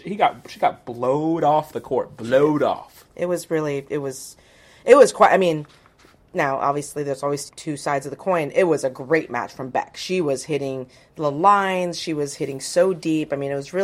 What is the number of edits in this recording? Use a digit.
1